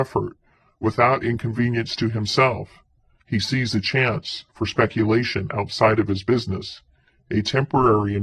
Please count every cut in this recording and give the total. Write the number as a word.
one